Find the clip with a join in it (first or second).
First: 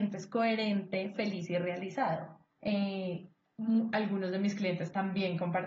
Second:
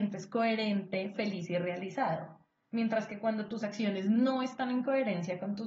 first